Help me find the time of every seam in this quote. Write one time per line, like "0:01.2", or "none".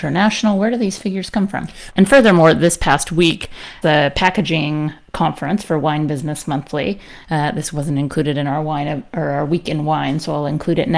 0:01.9
0:03.8